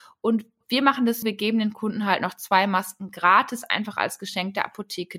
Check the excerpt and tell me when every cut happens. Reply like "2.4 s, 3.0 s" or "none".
1.2 s